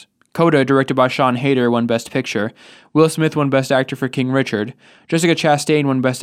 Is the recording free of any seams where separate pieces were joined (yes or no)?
yes